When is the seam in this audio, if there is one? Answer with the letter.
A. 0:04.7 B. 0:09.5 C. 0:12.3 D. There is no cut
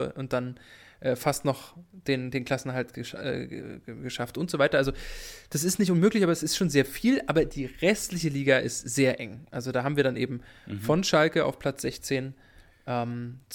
D